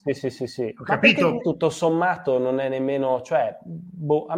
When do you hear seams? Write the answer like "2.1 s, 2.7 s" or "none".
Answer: 1.4 s